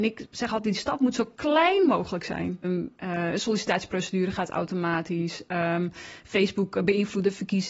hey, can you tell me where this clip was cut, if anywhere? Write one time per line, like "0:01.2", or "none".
0:02.6